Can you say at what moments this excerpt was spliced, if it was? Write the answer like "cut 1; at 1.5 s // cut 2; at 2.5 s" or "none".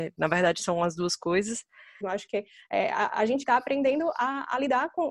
cut 1; at 2.0 s // cut 2; at 3.4 s